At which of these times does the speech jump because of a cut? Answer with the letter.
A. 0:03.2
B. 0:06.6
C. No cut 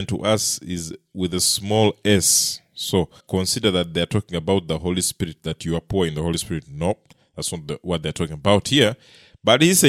A